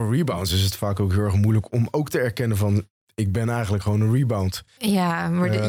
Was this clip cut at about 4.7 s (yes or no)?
yes